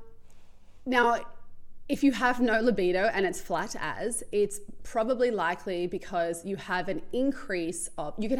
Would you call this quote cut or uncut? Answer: uncut